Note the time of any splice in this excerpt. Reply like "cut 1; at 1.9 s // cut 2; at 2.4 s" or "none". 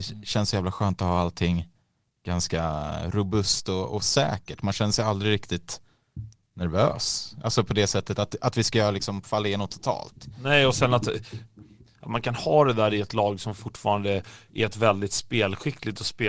none